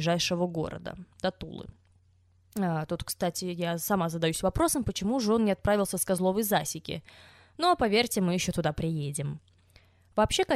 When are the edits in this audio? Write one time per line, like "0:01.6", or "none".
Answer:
none